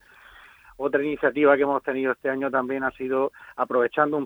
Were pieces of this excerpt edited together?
no; 0 cuts

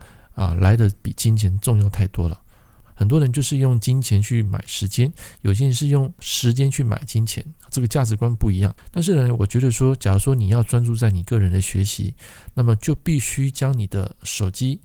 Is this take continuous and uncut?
yes; 0 cuts

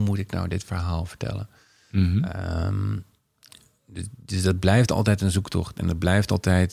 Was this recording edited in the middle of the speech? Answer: no; 0 cuts

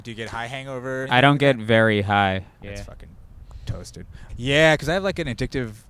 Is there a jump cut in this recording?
yes; 3 cuts; at 1.0 s, 2.6 s, 4.3 s

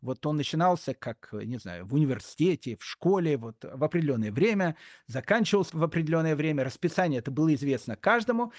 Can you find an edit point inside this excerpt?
yes; 1 cut; at 5.7 s

